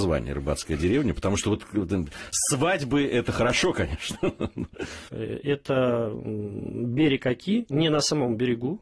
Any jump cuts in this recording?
yes; 1 cut; at 5.1 s

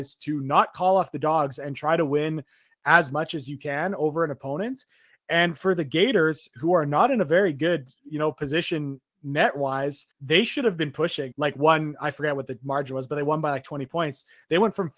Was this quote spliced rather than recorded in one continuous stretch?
yes; 2 cuts; at 10.1 s, 11.3 s

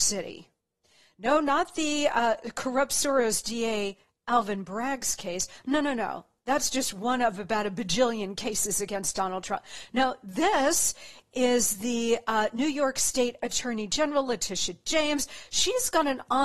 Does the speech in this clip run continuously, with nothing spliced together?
yes; 0 cuts

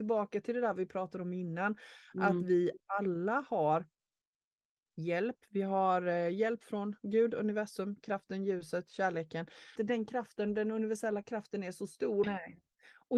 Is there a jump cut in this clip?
yes; 2 cuts; at 9.8 s, 12.2 s

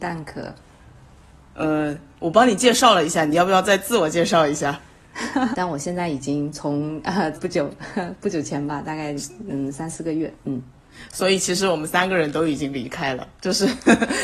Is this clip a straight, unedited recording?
no; 3 cuts; at 5.5 s, 7.3 s, 10.4 s

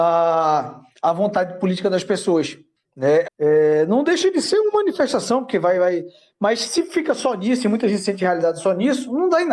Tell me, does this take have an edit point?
yes; 1 cut; at 3.2 s

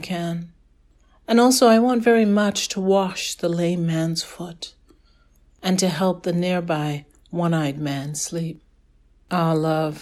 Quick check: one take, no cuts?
yes; 0 cuts

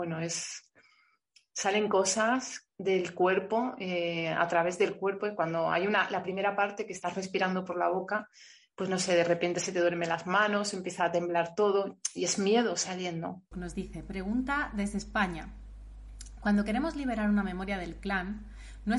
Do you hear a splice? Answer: yes; 1 cut; at 13.5 s

